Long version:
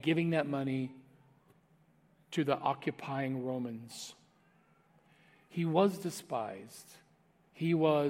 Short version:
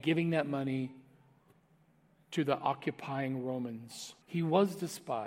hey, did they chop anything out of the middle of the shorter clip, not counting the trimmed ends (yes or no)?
yes